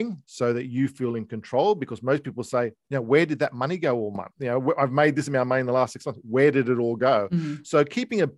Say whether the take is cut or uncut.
uncut